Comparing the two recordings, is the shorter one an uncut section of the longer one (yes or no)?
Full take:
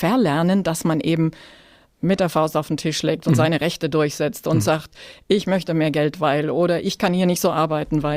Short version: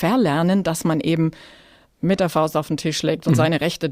yes